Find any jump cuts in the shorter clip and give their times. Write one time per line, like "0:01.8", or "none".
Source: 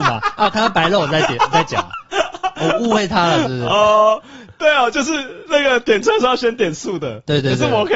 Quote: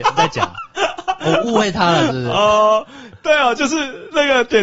none